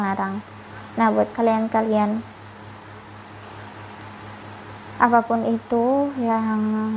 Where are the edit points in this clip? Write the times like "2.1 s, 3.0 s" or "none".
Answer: 1.3 s